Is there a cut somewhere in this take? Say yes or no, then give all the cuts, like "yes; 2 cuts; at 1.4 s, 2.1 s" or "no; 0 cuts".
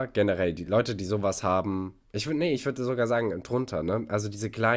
no; 0 cuts